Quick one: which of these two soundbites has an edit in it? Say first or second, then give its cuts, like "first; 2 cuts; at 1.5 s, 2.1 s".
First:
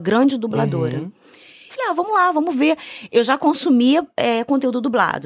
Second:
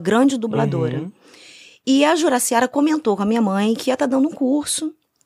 first; 1 cut; at 1.7 s